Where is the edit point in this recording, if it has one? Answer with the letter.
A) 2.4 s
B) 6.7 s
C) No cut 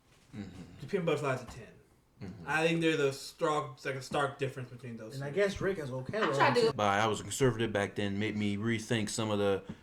B